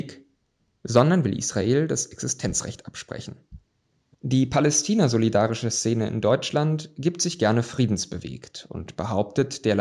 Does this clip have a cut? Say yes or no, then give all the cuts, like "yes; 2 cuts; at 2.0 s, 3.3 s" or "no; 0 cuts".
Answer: yes; 1 cut; at 4.1 s